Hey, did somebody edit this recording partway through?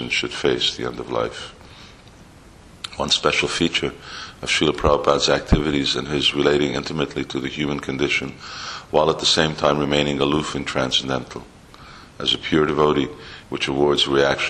yes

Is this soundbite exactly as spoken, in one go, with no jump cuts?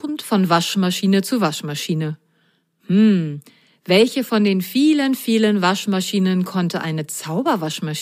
yes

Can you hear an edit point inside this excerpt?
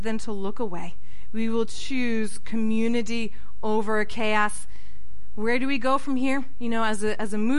no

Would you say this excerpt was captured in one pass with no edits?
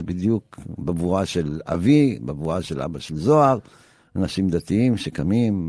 yes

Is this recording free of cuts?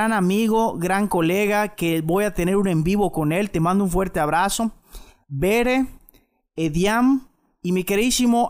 yes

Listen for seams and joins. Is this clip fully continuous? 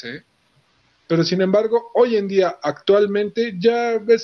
no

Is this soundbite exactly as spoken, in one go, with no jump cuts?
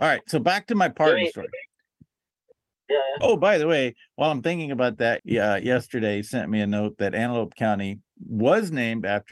no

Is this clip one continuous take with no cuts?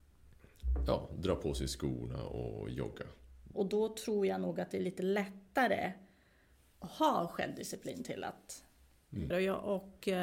no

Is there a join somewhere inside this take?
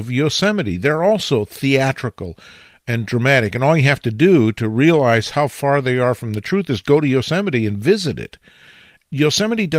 no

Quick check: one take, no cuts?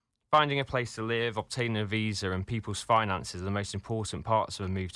yes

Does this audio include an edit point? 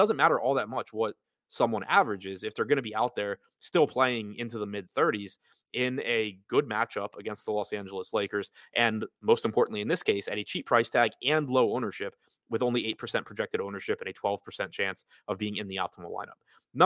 no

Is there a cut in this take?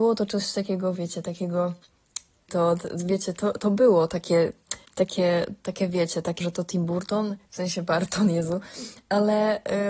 yes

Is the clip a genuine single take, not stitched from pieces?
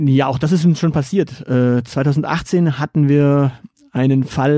yes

